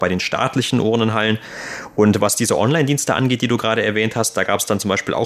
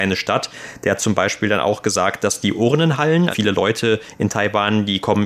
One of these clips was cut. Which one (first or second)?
second